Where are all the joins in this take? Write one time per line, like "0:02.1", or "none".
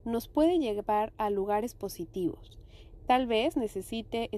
0:03.0

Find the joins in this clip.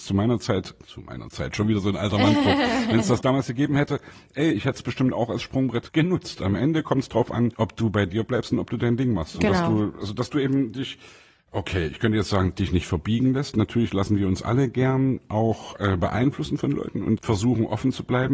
none

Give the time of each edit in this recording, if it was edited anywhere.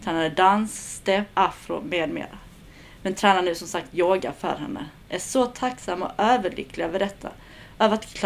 0:01.3

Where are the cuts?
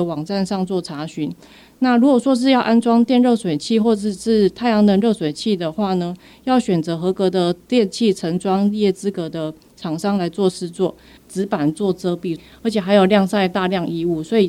0:11.2

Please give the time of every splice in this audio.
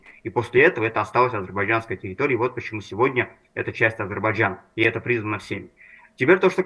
none

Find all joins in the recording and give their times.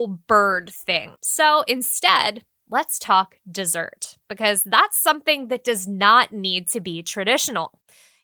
0:01.1

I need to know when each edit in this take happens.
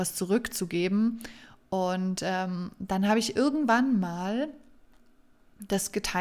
none

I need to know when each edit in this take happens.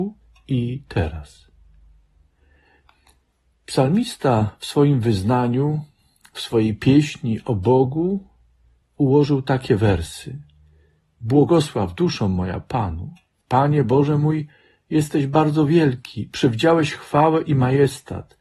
none

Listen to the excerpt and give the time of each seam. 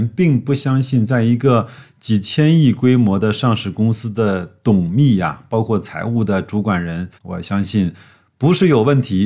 0:07.2

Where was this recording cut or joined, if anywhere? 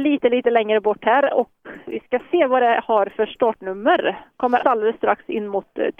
0:04.6

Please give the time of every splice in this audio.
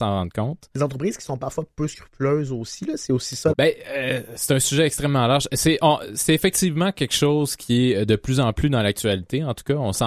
0:03.5

